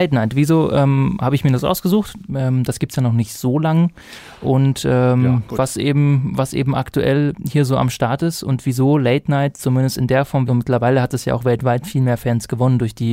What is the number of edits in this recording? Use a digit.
2